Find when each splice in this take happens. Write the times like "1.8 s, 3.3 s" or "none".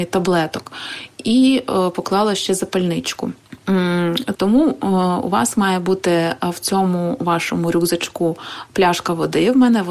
4.3 s